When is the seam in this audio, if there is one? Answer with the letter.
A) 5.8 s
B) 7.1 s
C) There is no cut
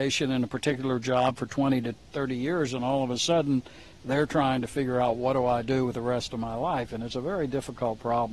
C